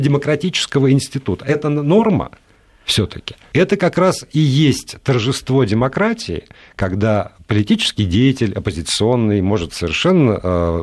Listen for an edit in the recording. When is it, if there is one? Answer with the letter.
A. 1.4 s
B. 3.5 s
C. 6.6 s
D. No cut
B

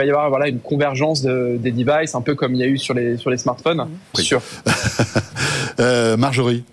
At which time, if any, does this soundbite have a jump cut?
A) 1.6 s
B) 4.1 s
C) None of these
B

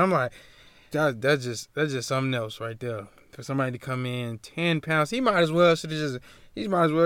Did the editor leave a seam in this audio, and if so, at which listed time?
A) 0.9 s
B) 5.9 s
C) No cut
A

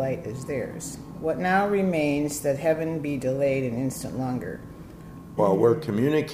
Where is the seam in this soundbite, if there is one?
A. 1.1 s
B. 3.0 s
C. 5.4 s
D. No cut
C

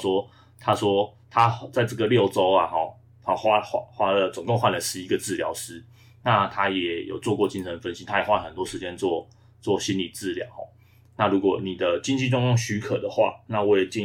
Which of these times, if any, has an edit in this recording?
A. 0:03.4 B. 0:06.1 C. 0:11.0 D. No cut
D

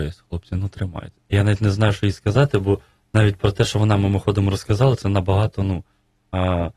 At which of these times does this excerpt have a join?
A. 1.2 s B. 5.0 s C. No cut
A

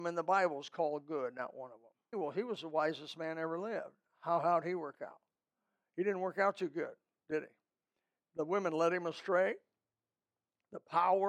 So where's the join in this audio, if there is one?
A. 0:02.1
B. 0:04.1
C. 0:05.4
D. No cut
A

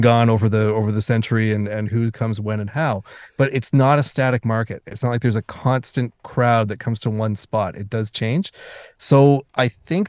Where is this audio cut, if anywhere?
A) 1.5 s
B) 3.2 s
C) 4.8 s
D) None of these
D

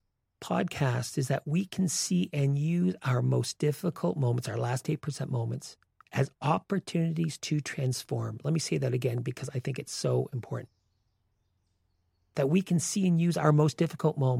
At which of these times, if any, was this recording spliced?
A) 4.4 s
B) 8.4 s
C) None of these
C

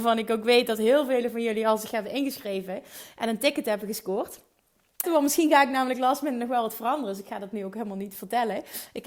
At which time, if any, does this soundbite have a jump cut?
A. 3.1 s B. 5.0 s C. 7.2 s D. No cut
B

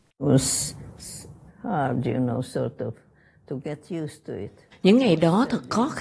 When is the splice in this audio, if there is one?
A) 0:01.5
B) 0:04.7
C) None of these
A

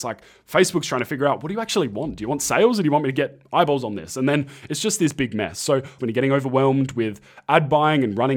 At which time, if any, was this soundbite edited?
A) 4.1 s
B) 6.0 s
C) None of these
B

